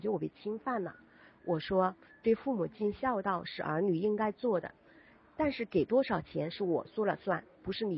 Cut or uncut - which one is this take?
uncut